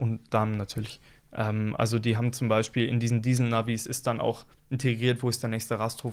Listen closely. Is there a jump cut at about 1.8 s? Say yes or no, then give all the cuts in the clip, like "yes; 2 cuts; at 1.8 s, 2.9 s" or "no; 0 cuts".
no; 0 cuts